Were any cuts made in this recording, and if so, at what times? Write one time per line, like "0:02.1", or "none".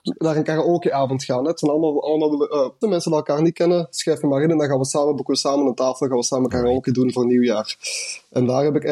0:02.8